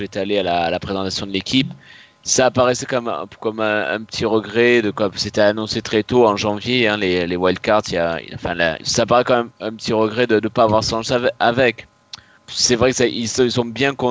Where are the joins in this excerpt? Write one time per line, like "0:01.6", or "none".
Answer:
0:08.8
0:12.4